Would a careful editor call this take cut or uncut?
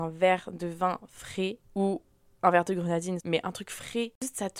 cut